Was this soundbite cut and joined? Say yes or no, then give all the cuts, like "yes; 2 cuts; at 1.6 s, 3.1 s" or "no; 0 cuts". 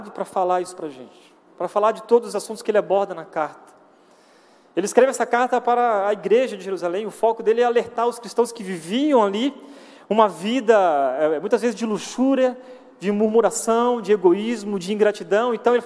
no; 0 cuts